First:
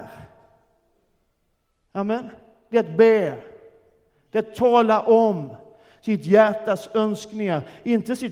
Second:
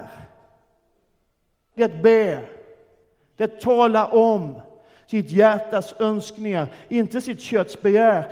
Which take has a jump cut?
second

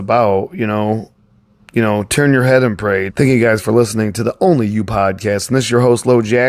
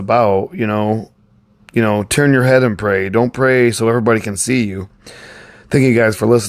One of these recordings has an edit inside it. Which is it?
first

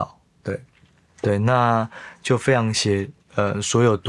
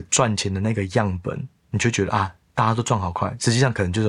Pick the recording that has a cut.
first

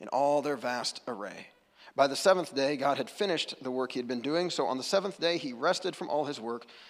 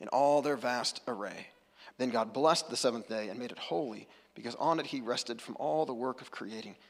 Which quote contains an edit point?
second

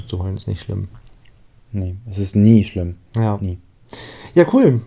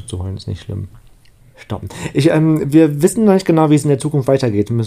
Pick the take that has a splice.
second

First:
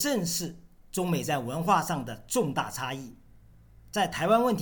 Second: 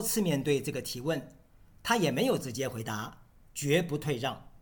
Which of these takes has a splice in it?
second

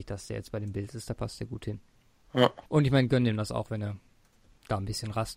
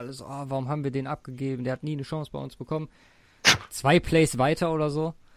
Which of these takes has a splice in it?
first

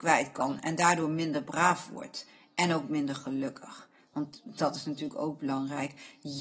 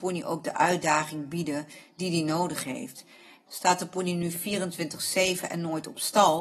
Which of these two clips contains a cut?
second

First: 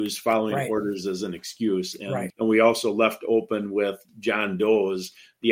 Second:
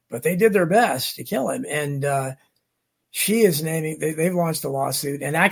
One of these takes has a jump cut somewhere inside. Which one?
first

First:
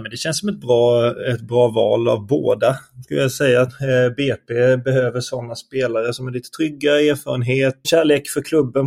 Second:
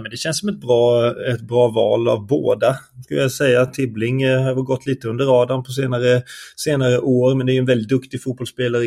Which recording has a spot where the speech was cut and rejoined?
first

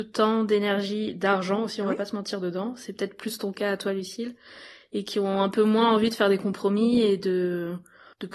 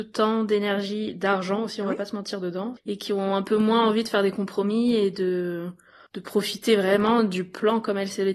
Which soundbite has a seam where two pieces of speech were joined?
second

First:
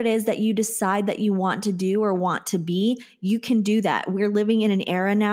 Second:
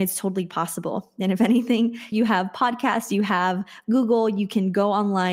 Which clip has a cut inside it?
second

